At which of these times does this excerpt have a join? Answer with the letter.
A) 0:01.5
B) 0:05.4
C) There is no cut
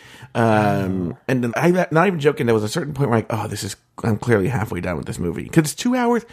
A